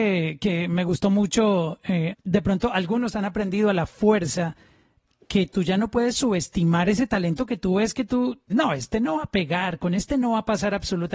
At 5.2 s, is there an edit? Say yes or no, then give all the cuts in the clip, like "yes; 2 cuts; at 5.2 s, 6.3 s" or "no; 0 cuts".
no; 2 cuts; at 2.1 s, 8.5 s